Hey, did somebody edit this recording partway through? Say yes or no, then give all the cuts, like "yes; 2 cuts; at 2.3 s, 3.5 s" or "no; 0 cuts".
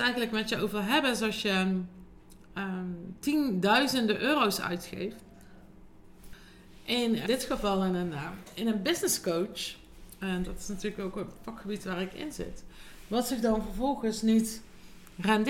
yes; 1 cut; at 7.3 s